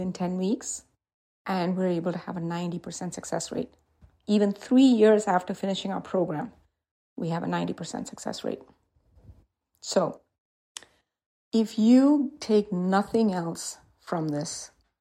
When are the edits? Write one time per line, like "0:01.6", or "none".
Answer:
none

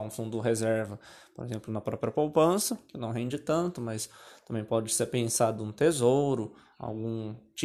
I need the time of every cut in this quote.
none

